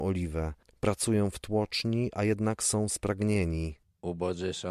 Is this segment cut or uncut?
uncut